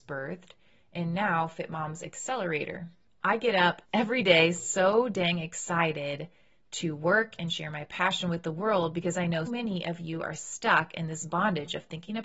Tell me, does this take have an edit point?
yes; 1 cut; at 9.4 s

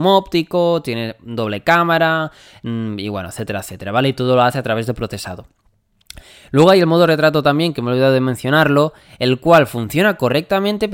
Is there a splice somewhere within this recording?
no; 0 cuts

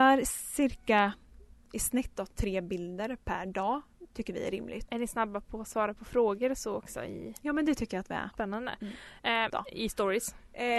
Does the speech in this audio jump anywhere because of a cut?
yes; 3 cuts; at 4.9 s, 8.3 s, 9.5 s

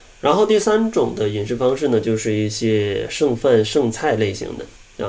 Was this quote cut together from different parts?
no; 0 cuts

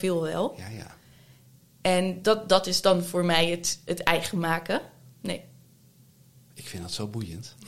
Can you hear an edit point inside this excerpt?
yes; 1 cut; at 5.1 s

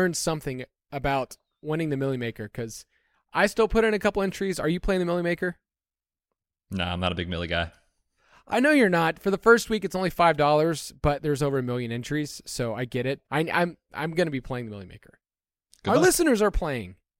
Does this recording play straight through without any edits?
no; 1 cut; at 13.2 s

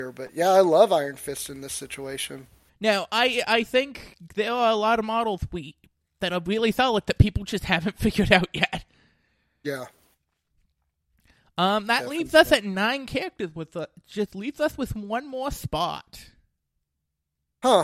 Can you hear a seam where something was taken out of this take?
yes; 1 cut; at 2.7 s

